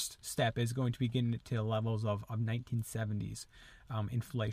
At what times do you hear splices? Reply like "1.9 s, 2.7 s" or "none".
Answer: none